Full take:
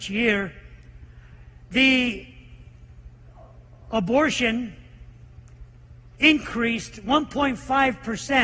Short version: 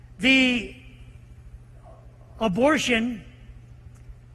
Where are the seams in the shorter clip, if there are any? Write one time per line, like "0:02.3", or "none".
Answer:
none